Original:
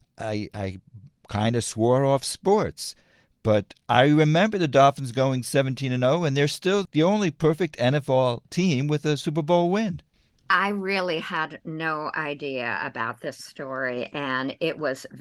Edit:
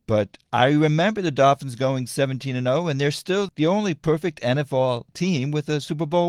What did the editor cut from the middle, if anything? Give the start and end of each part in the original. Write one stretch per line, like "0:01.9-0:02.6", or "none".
none